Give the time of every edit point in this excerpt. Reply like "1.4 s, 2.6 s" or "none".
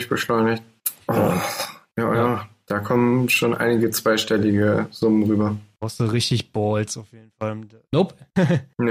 1.0 s